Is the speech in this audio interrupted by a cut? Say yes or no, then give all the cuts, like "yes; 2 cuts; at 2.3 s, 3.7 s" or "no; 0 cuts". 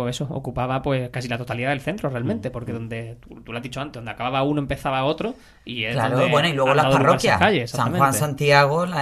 no; 0 cuts